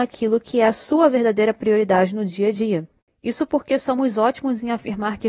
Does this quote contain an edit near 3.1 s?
no; 0 cuts

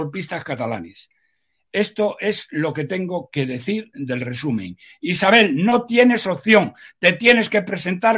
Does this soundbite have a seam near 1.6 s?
no; 0 cuts

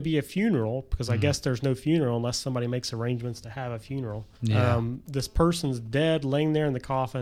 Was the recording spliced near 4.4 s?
yes; 1 cut; at 4.4 s

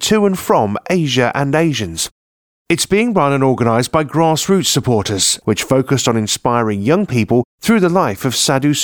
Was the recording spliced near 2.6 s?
no; 1 cut; at 5.4 s

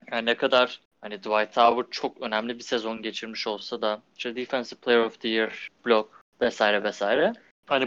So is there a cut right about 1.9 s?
no; 1 cut; at 5.8 s

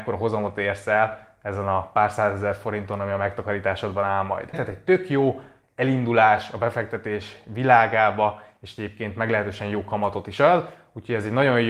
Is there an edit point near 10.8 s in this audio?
no; 1 cut; at 4.5 s

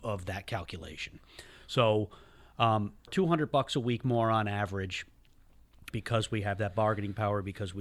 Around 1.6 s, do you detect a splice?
no; 2 cuts; at 3.1 s, 5.9 s

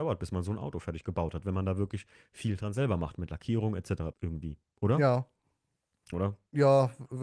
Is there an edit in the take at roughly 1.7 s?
no; 2 cuts; at 4.1 s, 6.1 s

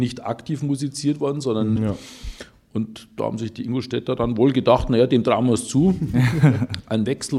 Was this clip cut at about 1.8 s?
yes; 1 cut; at 1.8 s

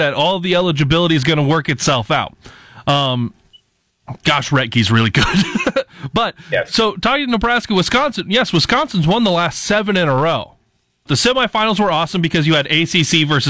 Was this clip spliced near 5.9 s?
no; 1 cut; at 11.1 s

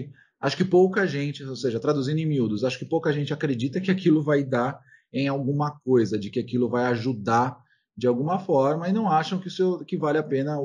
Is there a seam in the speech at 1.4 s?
no; 0 cuts

